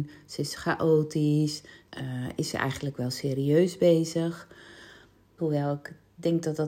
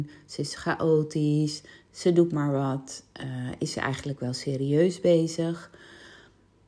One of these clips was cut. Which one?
first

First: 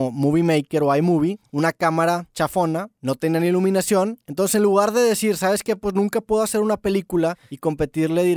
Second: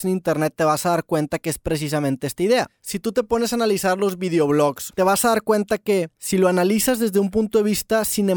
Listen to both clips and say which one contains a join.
second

